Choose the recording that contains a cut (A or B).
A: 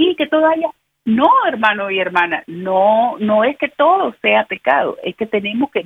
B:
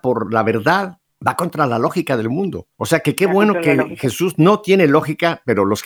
B